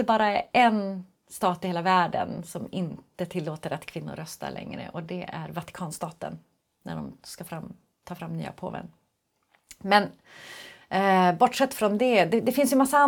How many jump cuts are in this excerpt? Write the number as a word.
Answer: zero